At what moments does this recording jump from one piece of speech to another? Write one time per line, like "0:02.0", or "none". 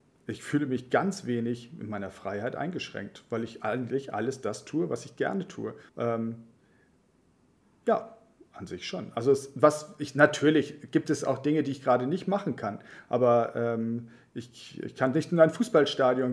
0:05.9